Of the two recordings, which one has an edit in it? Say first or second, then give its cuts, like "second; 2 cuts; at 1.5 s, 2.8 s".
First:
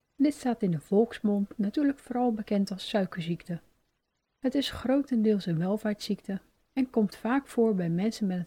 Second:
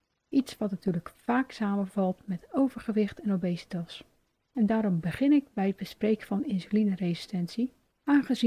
second; 1 cut; at 4.5 s